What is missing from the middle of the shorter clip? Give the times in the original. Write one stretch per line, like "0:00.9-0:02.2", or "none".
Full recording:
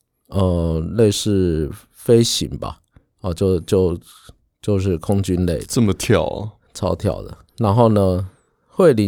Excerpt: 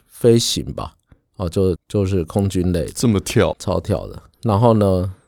0:03.6-0:04.5
0:06.3-0:06.7